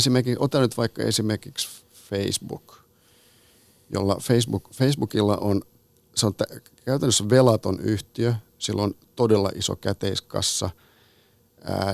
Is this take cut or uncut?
uncut